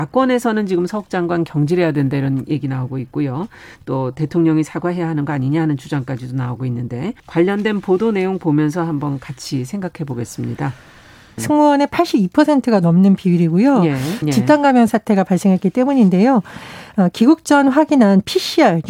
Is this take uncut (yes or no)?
no